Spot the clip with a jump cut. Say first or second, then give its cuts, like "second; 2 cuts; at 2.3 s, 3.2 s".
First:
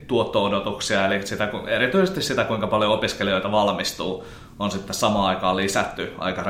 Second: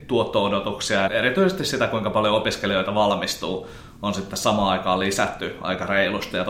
second; 1 cut; at 1.1 s